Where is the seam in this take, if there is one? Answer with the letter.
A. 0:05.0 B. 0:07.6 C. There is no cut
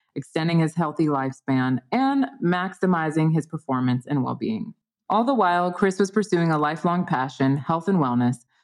A